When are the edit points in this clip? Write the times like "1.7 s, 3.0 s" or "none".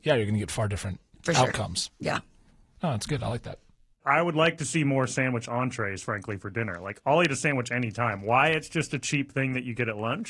none

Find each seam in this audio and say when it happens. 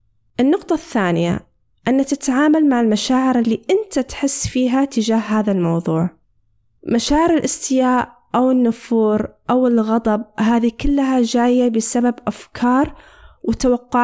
none

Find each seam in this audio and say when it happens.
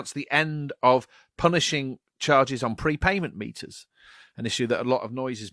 none

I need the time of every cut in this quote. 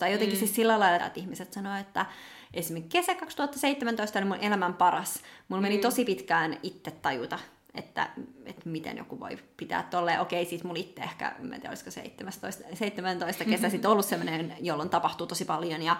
1.0 s

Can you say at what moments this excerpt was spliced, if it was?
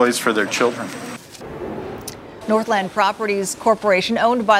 2.4 s

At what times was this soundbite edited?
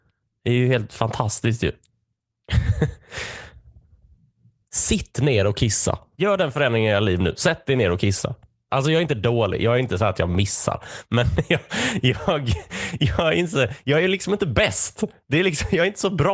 6.1 s, 8.7 s

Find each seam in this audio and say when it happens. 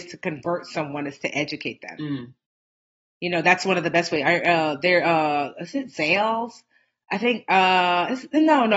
none

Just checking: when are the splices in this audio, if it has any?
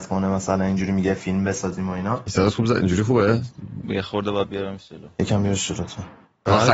3.8 s

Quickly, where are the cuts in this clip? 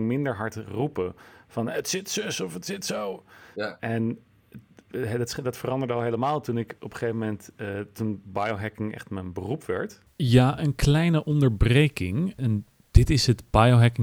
12.4 s

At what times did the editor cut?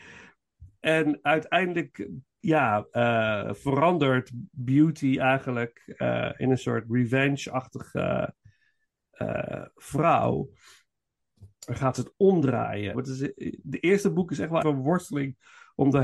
12.9 s, 14.6 s

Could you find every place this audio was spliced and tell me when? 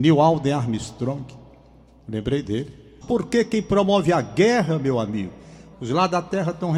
3.0 s, 5.7 s

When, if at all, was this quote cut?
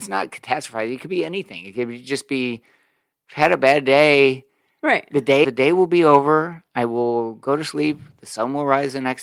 5.4 s

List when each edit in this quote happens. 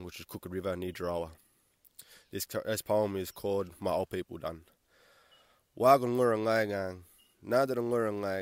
7.3 s

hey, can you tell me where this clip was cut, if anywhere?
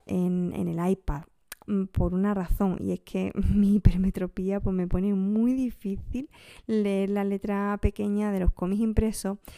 none

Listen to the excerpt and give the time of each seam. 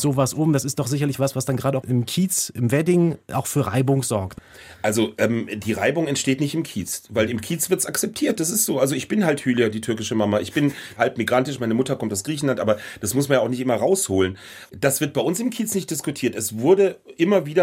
none

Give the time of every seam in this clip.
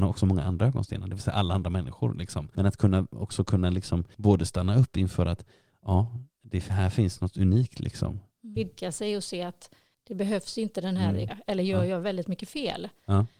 8.6 s, 11.3 s

